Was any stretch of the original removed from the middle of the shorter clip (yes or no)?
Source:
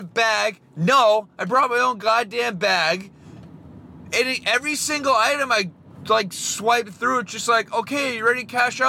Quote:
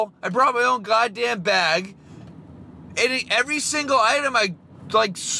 no